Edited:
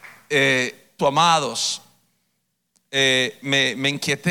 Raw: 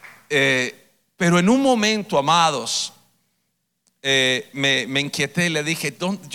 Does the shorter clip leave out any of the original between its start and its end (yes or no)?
yes